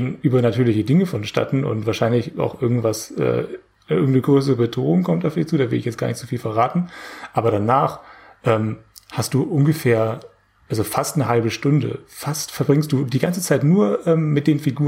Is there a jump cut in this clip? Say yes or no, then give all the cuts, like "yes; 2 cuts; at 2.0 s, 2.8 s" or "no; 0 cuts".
no; 0 cuts